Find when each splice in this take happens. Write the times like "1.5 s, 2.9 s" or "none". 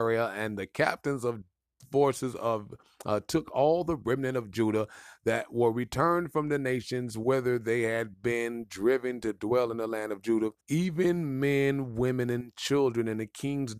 10.6 s